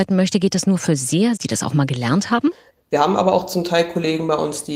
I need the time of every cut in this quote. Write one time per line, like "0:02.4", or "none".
0:01.4
0:02.7